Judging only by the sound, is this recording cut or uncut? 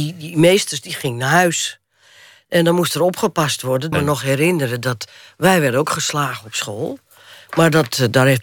cut